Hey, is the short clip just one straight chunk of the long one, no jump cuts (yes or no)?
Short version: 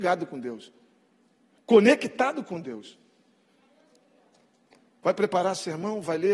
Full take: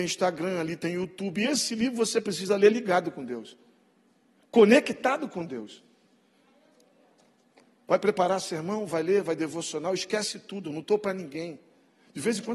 yes